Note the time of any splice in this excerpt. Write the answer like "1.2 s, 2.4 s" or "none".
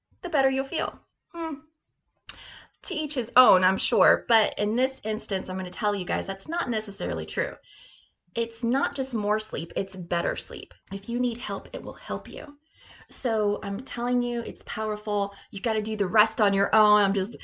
10.8 s